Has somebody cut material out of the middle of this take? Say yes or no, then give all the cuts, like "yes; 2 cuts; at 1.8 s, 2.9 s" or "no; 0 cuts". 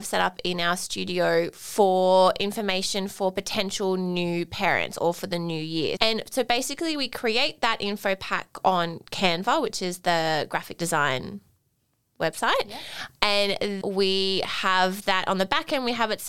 yes; 2 cuts; at 6.0 s, 13.8 s